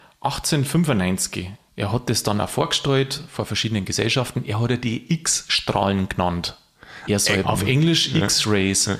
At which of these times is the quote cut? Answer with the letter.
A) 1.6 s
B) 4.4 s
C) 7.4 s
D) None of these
C